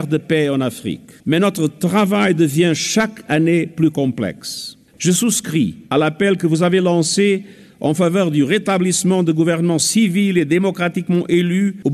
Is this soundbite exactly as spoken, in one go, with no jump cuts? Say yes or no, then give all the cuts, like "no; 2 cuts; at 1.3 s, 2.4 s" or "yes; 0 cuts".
no; 1 cut; at 4.9 s